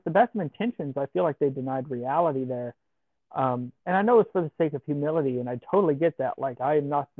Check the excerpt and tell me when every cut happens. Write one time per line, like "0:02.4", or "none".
none